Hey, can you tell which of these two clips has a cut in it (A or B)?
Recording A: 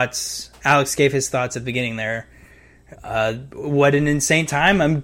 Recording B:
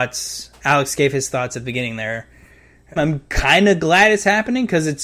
B